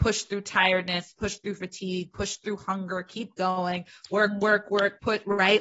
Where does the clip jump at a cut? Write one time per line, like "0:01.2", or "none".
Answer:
none